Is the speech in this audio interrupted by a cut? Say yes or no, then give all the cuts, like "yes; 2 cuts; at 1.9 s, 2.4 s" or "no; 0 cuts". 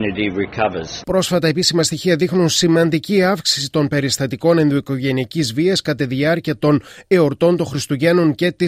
yes; 1 cut; at 1.0 s